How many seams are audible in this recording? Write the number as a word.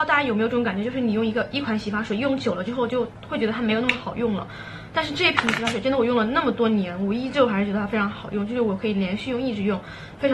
zero